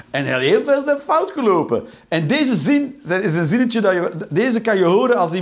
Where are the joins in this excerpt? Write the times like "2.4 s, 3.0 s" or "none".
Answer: none